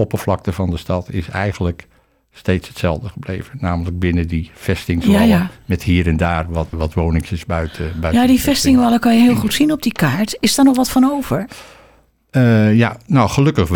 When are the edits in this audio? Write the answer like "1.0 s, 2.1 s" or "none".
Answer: 6.7 s